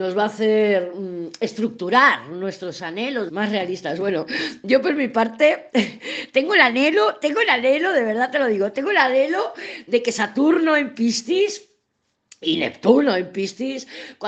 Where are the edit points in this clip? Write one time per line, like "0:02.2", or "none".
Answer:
0:03.3

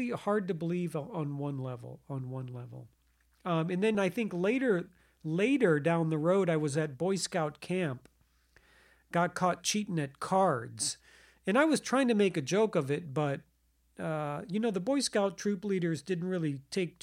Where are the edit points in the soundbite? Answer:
0:03.9

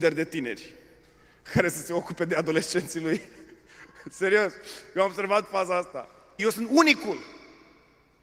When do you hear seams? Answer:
0:06.4

